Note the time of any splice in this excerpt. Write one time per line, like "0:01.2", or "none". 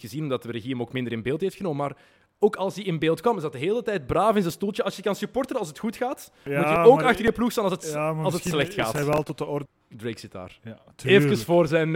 0:09.7

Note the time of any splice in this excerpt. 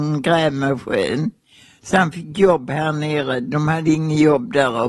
none

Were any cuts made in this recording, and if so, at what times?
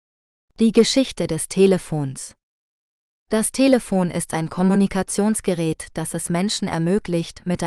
none

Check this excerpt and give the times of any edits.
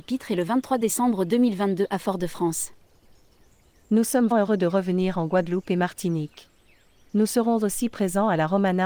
0:04.3

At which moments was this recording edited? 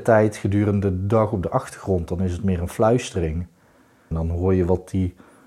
0:04.1

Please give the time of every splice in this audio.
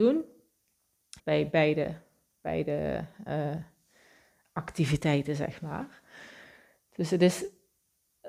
0:01.2

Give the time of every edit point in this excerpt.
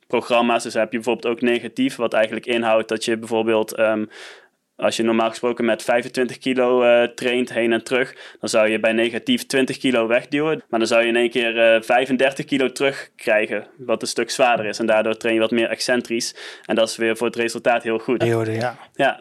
0:10.6
0:18.2

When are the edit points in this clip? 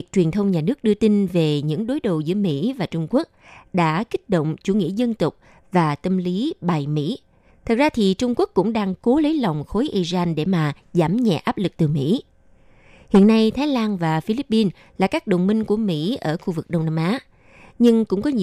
0:07.5

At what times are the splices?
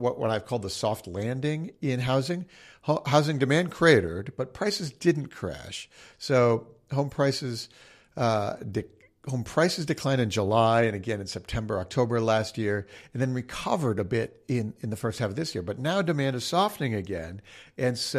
none

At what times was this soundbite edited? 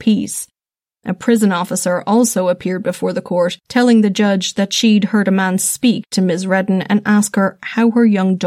0:01.0

